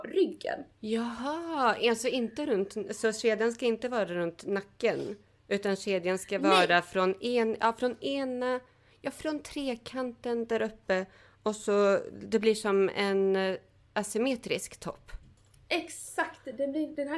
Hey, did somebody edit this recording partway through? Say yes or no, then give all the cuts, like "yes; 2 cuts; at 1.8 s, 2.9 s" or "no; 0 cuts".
no; 0 cuts